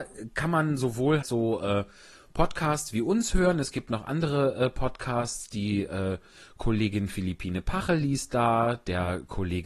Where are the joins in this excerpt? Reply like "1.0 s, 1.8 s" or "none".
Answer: 1.2 s